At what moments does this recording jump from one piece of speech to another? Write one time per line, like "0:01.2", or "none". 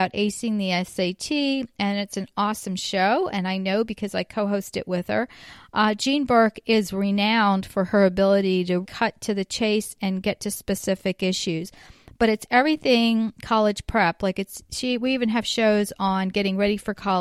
0:08.8